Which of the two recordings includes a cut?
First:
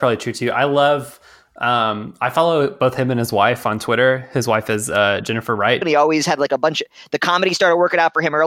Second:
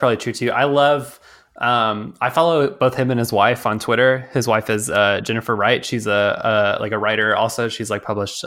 first; 1 cut; at 5.8 s

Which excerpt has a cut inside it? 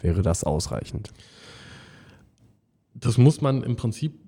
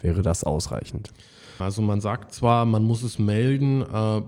second; 1 cut; at 1.6 s

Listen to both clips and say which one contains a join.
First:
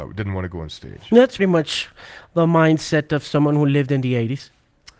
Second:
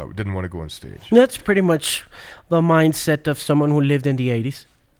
first; 1 cut; at 1.4 s

